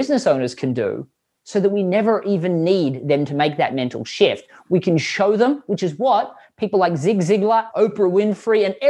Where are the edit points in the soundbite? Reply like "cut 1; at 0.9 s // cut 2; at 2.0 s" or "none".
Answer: cut 1; at 7.7 s